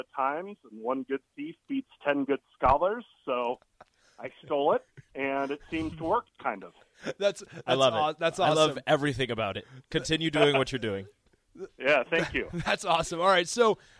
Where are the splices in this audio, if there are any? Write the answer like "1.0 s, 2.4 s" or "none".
none